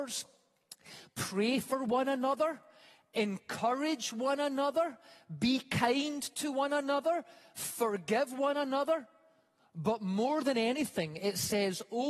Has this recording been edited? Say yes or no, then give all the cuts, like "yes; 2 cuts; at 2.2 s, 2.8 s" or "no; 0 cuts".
no; 0 cuts